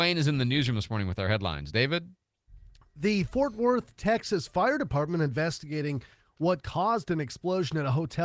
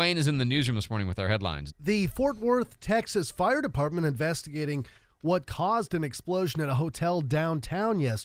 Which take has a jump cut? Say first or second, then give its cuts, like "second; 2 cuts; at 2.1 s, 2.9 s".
second; 1 cut; at 1.7 s